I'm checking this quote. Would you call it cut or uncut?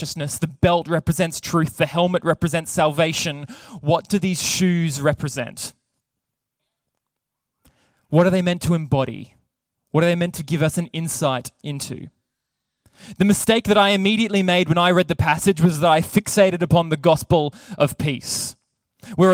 uncut